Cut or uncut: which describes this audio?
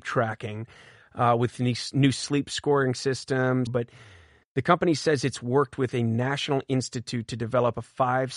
cut